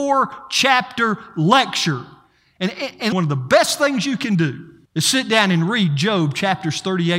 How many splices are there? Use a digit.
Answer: 2